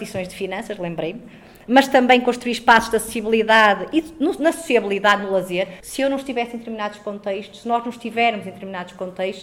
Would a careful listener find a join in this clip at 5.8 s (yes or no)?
yes